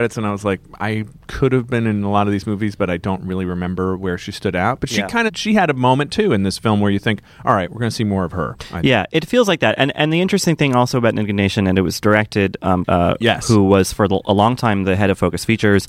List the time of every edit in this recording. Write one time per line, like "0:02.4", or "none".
0:12.8